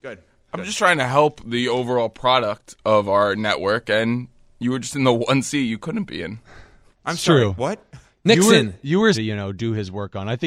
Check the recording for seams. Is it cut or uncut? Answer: cut